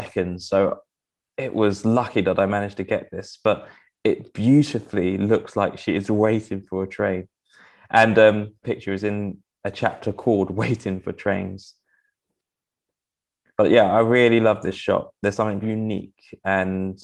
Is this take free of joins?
no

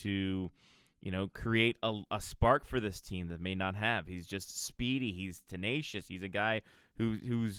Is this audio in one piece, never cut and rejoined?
yes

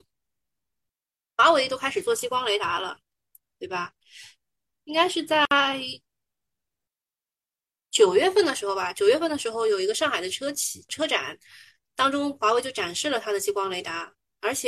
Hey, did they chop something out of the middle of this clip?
yes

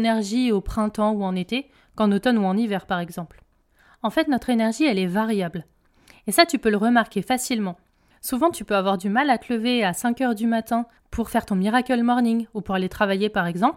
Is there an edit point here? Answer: no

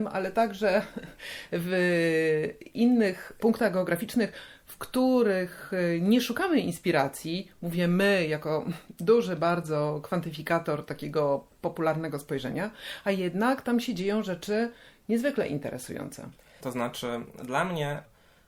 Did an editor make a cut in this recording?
yes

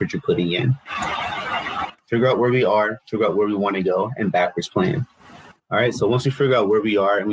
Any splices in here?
yes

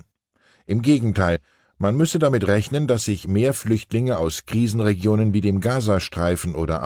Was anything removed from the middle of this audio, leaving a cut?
no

